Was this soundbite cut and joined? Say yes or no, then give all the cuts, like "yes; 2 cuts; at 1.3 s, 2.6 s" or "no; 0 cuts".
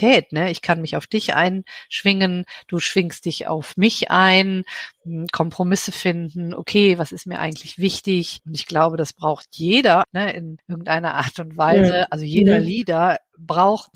yes; 1 cut; at 10.0 s